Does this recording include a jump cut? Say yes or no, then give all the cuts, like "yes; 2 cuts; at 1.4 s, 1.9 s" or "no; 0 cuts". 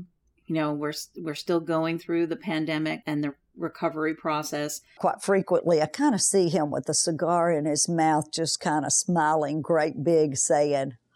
yes; 2 cuts; at 3.0 s, 5.0 s